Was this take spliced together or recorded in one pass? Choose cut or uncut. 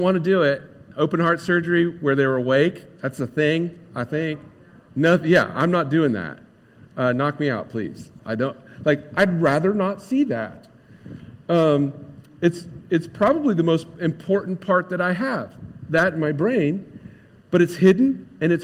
cut